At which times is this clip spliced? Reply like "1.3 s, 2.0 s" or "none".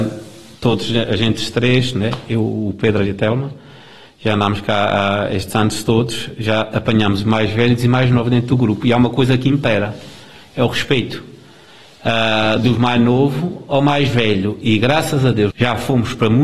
15.5 s